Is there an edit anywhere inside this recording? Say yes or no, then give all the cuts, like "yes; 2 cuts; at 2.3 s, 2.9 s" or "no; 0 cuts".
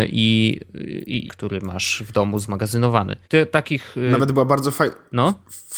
yes; 2 cuts; at 1.3 s, 3.2 s